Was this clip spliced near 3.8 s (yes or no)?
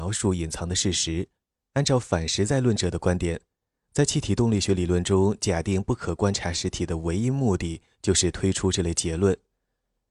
no